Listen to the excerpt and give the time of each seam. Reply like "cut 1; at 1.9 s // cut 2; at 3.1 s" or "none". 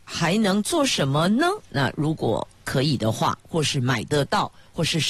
cut 1; at 1.7 s // cut 2; at 3.4 s